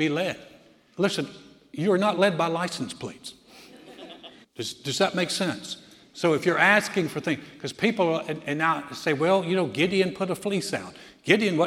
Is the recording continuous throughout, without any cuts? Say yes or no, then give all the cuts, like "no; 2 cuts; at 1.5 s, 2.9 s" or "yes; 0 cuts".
no; 2 cuts; at 0.9 s, 4.4 s